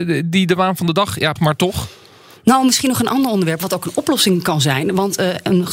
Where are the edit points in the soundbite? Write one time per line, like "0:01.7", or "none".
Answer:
0:01.4